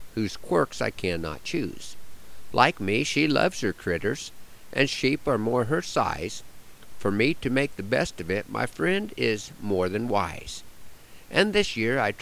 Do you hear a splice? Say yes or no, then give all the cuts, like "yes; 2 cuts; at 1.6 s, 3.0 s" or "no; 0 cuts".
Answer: no; 0 cuts